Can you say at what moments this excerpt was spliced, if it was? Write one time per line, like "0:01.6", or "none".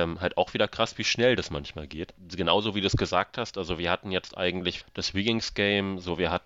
0:02.2
0:04.8